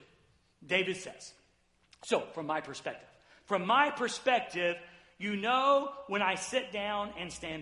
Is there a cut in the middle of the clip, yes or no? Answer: no